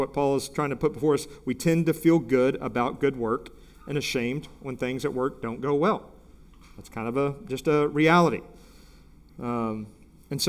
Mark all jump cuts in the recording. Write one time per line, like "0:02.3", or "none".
none